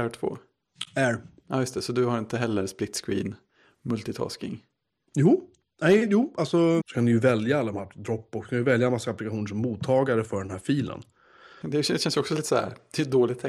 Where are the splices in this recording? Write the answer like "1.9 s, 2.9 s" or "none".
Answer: 6.8 s, 11.6 s